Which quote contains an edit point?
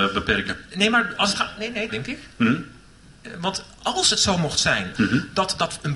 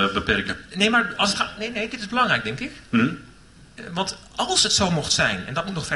first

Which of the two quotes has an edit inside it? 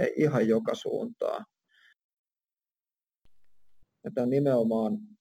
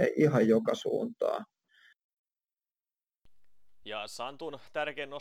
first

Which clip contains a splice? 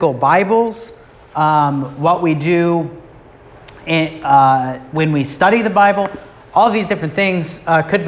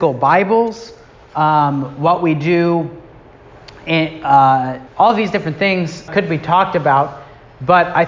second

